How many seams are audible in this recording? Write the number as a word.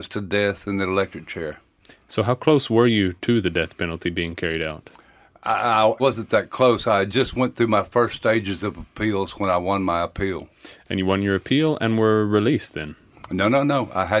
one